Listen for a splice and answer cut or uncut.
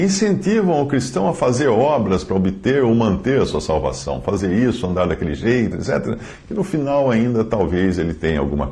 cut